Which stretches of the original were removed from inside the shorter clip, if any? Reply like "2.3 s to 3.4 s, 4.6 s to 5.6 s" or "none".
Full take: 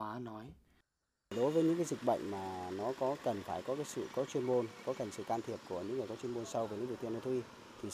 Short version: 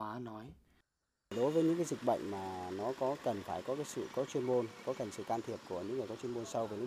none